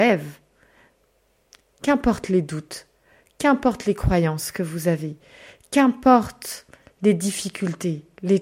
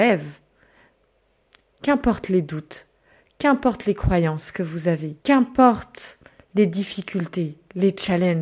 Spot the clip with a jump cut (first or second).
second